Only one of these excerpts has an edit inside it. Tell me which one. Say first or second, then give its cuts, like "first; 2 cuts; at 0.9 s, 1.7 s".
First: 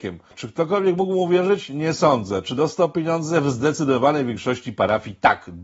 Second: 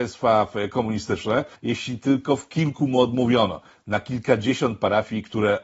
second; 1 cut; at 1.5 s